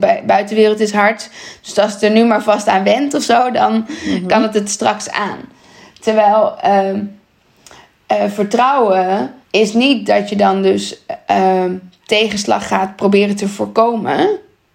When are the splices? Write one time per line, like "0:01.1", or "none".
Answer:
0:09.4